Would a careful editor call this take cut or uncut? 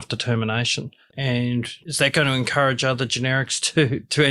cut